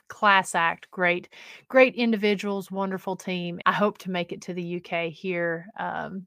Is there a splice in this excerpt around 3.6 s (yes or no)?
yes